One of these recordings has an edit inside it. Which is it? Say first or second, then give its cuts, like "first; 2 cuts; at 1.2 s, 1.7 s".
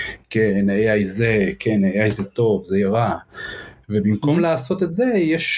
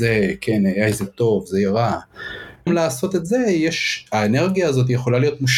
second; 1 cut; at 2.7 s